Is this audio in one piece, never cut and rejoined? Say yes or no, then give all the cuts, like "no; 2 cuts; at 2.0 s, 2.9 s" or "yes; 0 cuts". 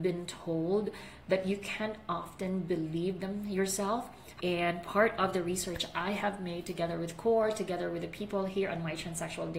no; 1 cut; at 4.4 s